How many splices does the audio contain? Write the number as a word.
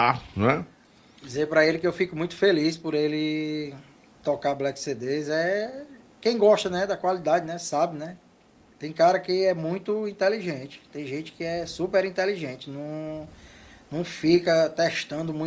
zero